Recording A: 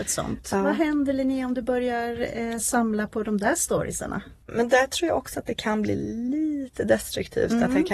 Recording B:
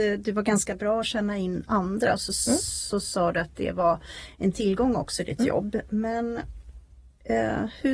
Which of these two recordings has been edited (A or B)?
A